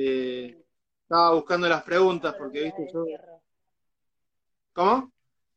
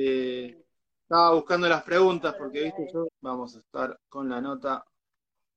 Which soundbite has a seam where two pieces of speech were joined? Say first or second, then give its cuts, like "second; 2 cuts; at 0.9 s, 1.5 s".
second; 1 cut; at 3.1 s